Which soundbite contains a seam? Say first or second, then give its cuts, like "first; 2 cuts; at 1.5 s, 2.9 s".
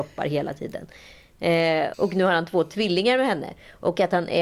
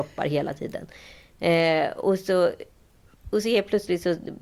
first; 1 cut; at 1.9 s